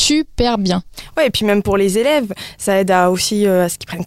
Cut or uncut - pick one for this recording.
uncut